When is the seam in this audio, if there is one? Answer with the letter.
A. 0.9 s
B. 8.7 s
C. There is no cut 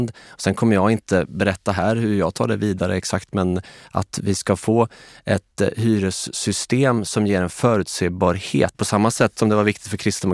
B